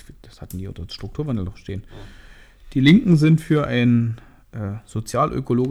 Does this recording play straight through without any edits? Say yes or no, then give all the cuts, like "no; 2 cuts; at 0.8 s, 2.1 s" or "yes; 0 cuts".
yes; 0 cuts